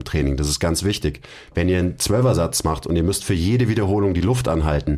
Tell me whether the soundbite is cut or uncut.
uncut